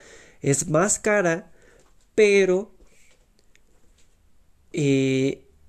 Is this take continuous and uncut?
yes; 0 cuts

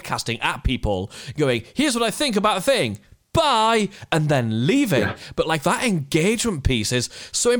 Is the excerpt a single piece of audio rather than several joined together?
yes; 0 cuts

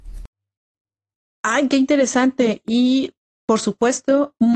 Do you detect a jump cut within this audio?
no; 0 cuts

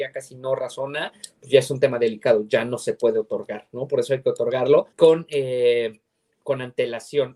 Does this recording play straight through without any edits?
no; 1 cut; at 4.9 s

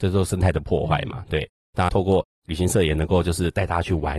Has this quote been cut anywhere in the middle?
yes; 1 cut; at 1.9 s

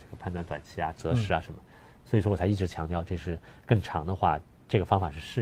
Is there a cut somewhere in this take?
no; 0 cuts

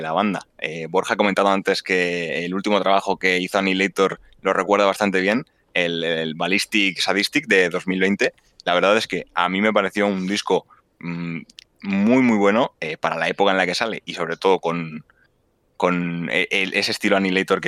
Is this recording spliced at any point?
no; 0 cuts

